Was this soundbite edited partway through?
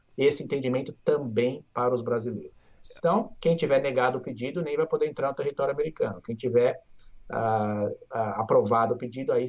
yes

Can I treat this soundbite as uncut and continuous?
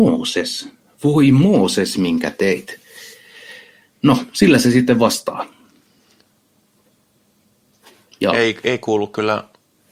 yes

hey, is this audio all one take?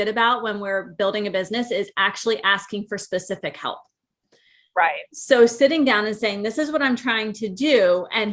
yes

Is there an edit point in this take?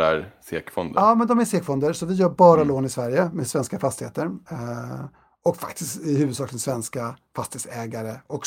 no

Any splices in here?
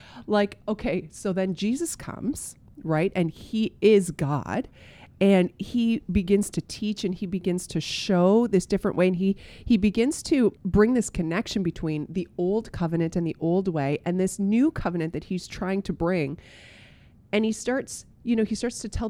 yes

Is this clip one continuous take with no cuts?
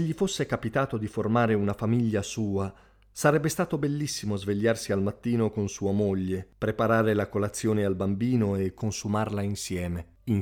yes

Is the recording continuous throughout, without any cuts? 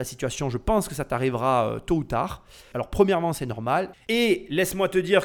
no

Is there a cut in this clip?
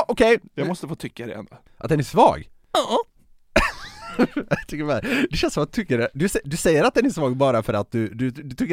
no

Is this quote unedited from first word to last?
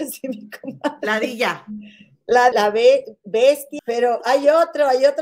no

